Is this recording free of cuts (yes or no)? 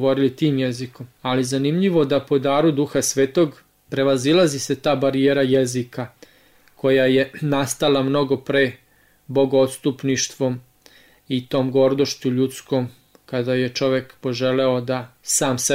yes